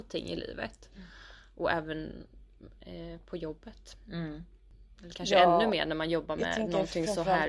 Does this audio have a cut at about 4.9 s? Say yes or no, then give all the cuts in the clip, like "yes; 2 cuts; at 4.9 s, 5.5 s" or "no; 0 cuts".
no; 0 cuts